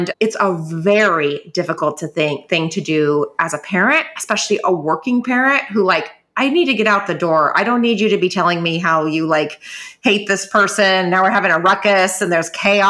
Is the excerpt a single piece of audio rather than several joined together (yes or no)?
yes